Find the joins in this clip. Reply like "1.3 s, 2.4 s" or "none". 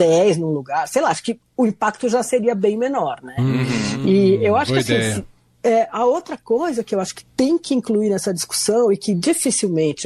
none